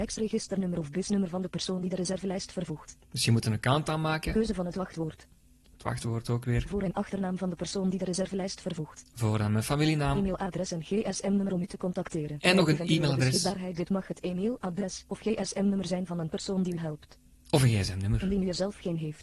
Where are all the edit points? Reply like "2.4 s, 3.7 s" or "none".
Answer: none